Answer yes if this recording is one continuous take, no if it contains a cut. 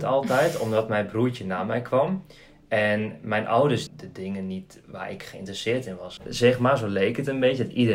no